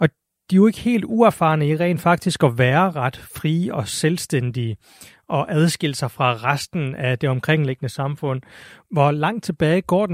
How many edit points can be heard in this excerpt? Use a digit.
0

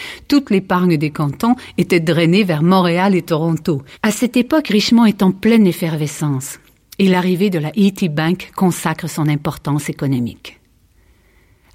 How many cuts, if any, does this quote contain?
1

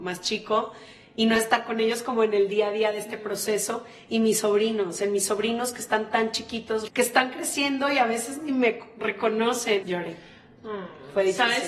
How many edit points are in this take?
2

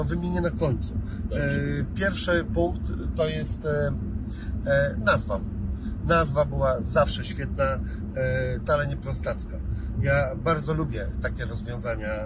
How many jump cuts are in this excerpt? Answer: 1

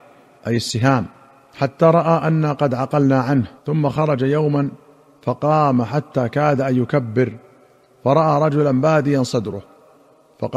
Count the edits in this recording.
1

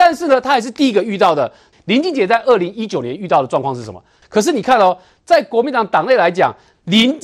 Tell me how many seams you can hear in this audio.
2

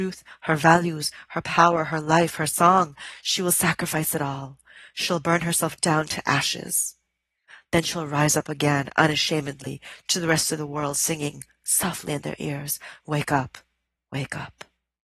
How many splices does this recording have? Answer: 0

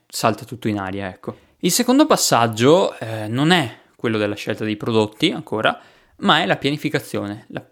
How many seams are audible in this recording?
0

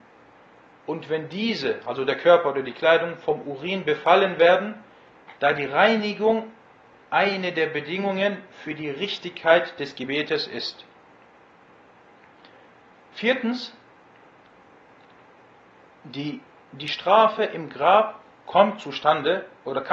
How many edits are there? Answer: 1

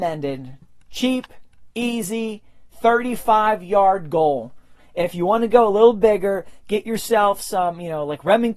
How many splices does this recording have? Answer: 0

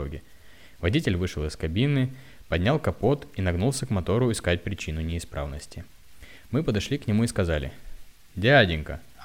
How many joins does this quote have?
0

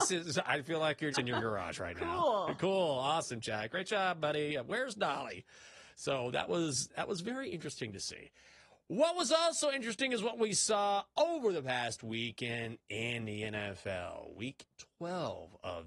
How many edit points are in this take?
1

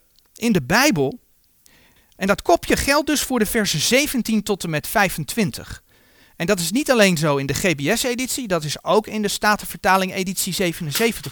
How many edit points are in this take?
1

